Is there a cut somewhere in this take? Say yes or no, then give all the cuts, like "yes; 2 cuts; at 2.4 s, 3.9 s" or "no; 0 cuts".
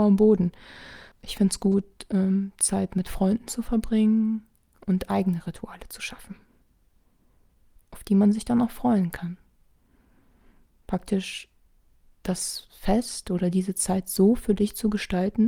yes; 1 cut; at 1.1 s